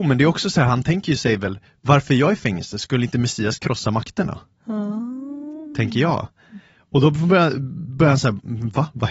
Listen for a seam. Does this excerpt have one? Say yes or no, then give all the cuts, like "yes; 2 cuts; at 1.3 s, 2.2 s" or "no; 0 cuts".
no; 0 cuts